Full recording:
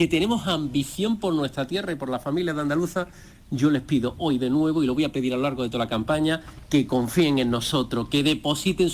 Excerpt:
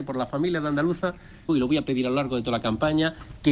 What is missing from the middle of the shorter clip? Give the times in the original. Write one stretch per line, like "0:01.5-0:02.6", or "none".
0:03.4-0:04.8